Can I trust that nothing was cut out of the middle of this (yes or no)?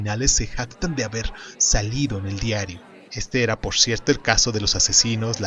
no